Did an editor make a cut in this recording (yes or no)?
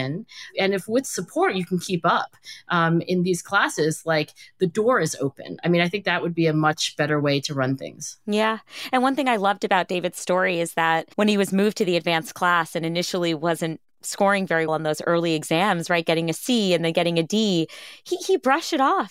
yes